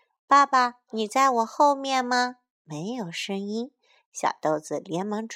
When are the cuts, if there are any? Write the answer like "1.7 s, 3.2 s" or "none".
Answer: none